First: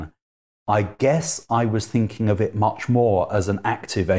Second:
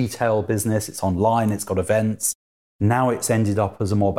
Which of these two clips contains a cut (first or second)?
second